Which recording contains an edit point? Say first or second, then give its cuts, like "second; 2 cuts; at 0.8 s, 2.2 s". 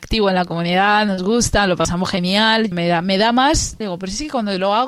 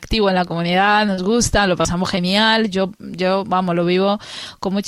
first; 2 cuts; at 2.7 s, 3.8 s